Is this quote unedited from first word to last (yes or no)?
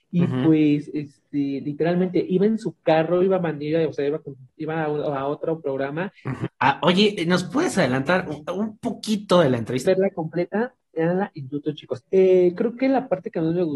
no